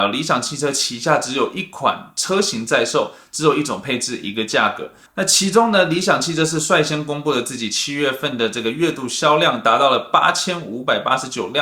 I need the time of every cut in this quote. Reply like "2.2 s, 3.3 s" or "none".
5.1 s